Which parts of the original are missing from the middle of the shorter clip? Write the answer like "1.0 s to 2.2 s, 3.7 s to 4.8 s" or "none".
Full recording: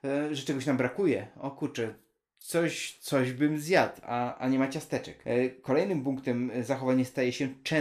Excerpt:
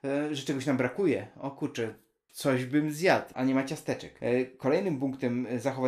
2.3 s to 3.0 s, 4.0 s to 4.4 s